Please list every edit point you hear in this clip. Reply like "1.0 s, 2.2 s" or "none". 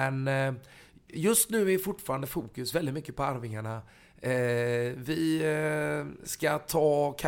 none